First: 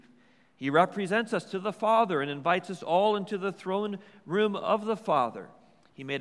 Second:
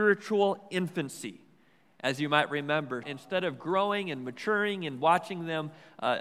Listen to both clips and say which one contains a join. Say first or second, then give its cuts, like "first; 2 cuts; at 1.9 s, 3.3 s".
second; 1 cut; at 3.0 s